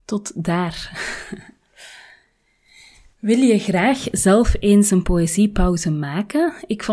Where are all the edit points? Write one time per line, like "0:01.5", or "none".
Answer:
none